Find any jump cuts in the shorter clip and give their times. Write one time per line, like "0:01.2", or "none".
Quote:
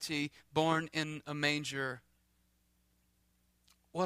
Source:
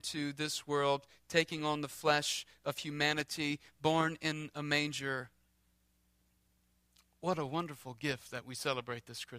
none